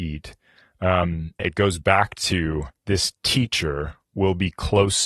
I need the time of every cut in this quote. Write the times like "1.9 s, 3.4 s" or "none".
1.4 s, 2.8 s